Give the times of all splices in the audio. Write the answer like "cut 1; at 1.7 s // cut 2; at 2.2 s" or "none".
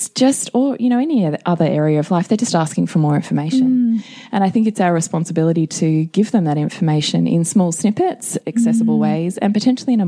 cut 1; at 8.4 s